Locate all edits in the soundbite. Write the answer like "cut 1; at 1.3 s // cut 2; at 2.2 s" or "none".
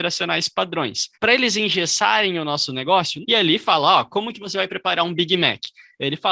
cut 1; at 1.1 s // cut 2; at 3.2 s